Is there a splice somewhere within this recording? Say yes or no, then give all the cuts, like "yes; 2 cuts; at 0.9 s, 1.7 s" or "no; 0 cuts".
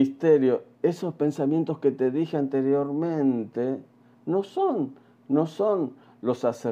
no; 0 cuts